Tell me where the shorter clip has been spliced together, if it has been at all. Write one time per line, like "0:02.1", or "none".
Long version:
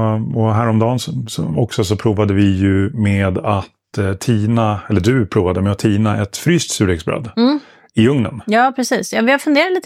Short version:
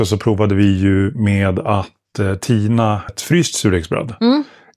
0:03.1